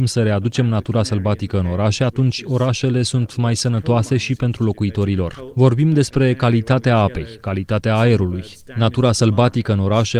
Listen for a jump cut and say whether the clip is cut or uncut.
uncut